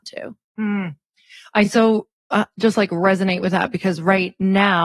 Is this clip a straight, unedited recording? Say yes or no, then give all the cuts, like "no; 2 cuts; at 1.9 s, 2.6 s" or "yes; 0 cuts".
yes; 0 cuts